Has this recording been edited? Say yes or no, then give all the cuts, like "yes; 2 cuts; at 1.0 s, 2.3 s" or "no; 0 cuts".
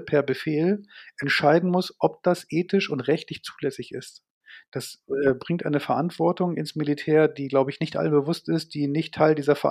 no; 0 cuts